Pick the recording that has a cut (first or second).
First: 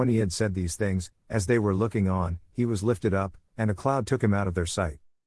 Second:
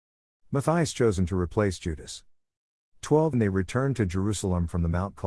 second